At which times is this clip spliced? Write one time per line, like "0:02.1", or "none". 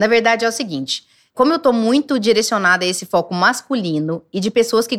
0:01.3